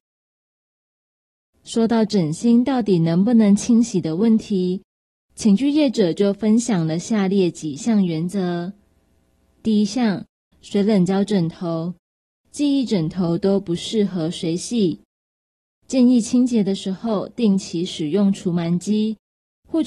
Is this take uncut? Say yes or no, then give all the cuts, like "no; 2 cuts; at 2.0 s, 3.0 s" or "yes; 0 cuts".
no; 1 cut; at 10.5 s